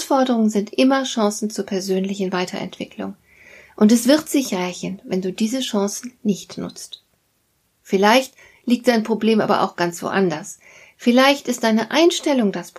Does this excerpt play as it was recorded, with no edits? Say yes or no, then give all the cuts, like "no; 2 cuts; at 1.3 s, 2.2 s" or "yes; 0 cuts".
yes; 0 cuts